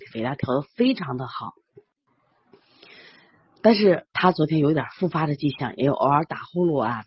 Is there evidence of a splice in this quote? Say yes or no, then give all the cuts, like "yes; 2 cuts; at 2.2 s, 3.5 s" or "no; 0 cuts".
no; 0 cuts